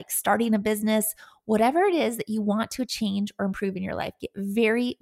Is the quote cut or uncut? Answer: uncut